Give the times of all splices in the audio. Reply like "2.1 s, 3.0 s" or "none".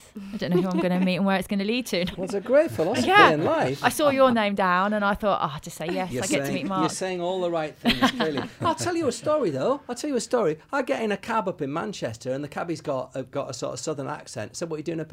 2.1 s